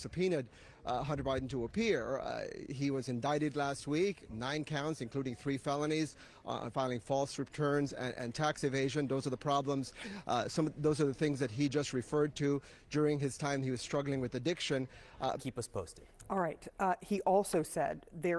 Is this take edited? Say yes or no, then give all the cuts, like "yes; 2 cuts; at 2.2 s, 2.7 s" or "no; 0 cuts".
yes; 2 cuts; at 6.7 s, 15.4 s